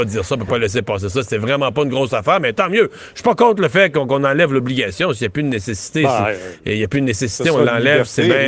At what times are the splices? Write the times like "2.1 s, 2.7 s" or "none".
none

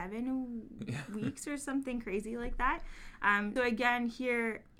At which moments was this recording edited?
3.6 s

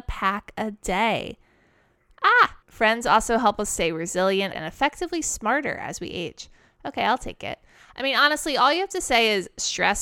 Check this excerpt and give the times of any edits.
2.6 s, 4.5 s

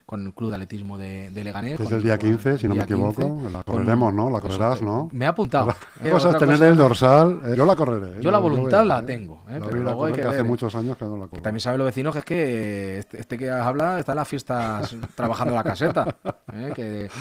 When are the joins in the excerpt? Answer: 6.0 s, 7.5 s

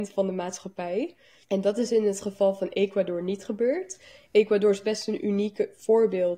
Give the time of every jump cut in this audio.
1.4 s

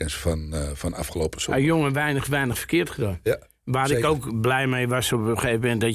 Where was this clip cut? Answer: none

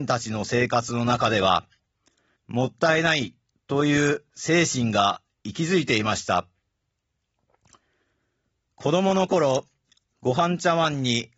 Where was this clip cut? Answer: 2.4 s

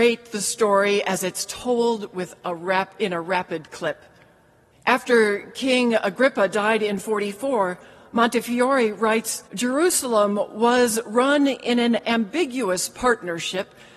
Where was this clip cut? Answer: 4.7 s, 9.5 s

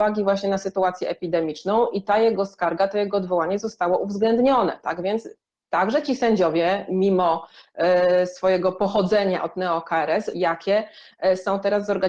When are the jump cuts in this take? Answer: 10.3 s

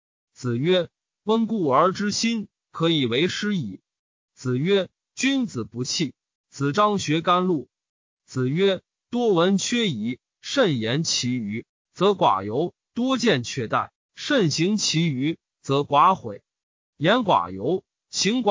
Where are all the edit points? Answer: 6.4 s

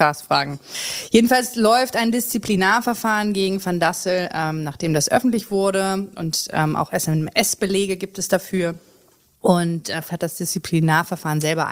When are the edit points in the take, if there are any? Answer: 10.1 s

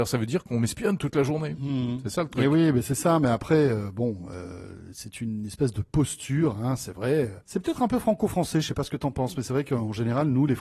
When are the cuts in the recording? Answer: 7.4 s

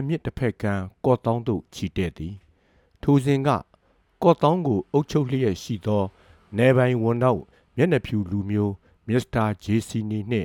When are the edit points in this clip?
none

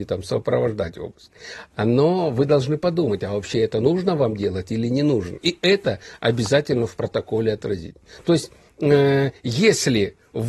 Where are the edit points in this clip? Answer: 5.4 s

